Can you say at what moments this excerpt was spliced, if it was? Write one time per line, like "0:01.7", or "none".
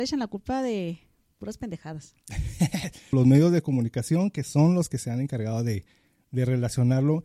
0:03.1